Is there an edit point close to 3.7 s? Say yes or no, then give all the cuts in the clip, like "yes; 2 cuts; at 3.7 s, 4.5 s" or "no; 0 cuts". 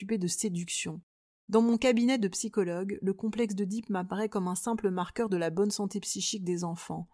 no; 1 cut; at 1.3 s